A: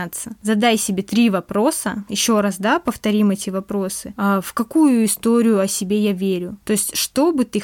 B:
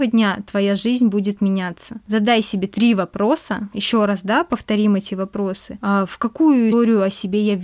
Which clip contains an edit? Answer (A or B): B